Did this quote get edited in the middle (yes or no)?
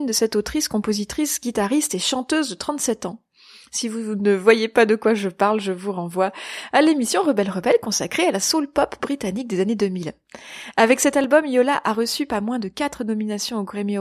no